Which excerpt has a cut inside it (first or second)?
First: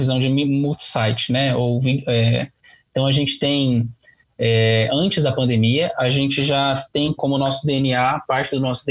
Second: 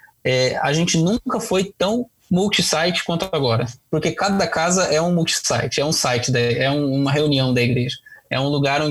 first